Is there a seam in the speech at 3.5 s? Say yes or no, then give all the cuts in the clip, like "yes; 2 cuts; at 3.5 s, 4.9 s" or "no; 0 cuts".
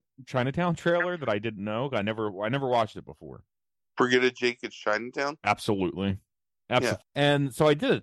no; 1 cut; at 7.0 s